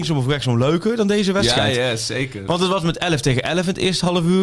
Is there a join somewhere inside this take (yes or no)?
no